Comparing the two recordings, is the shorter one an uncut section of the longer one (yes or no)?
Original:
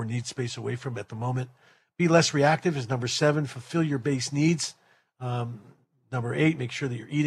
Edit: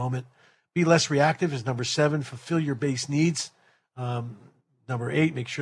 yes